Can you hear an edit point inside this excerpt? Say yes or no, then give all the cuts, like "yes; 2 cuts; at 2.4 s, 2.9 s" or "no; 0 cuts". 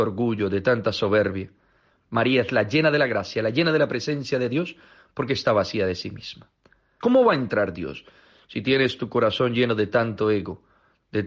yes; 2 cuts; at 1.9 s, 7.0 s